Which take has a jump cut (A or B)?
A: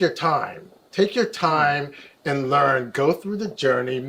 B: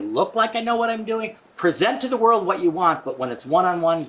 B